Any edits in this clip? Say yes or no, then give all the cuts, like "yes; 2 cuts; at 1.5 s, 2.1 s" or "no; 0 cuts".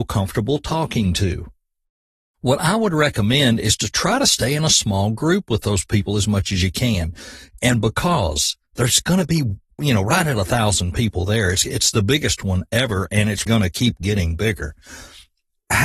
yes; 2 cuts; at 9.8 s, 13.5 s